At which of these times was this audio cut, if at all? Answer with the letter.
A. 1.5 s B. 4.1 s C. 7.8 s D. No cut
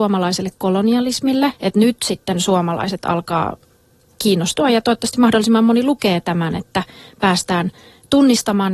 A